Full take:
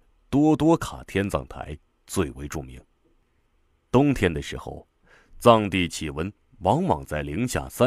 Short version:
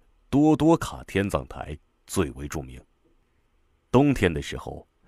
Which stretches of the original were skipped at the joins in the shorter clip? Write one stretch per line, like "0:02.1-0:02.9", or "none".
none